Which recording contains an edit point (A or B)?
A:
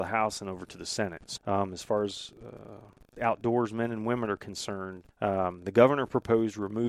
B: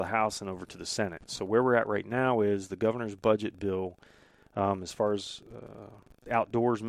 A